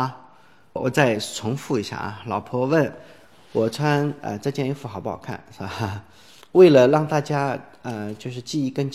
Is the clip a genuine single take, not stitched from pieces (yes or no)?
no